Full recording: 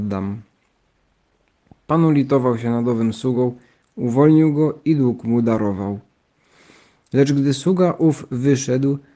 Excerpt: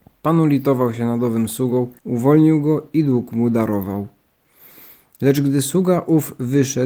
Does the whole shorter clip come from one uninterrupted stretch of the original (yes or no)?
no